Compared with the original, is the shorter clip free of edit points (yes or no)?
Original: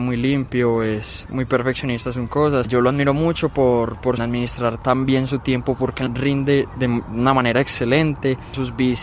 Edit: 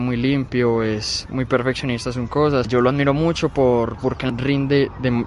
no